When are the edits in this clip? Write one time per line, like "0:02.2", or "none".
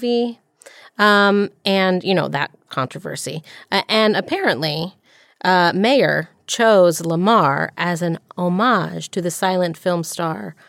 none